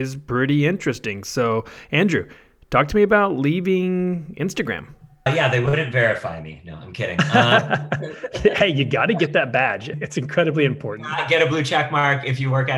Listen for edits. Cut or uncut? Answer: uncut